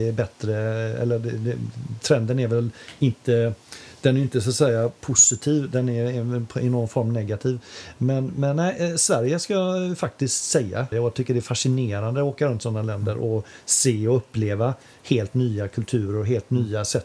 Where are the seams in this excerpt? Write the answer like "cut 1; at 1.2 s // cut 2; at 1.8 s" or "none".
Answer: cut 1; at 10.9 s